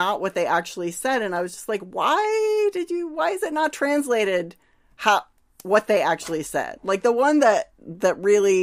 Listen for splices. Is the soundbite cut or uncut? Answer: uncut